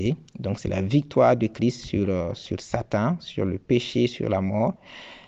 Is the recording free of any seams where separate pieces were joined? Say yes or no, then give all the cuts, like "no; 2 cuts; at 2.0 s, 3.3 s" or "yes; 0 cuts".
yes; 0 cuts